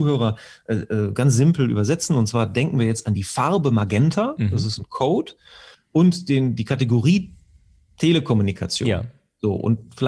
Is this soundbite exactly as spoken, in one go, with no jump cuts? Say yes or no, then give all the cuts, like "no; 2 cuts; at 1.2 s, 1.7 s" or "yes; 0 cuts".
no; 1 cut; at 5.7 s